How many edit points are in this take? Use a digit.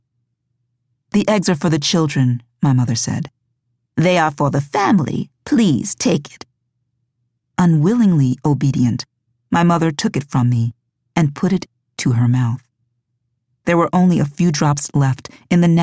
0